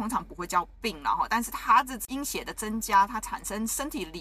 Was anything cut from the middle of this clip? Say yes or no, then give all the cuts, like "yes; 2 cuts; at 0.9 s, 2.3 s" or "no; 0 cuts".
no; 0 cuts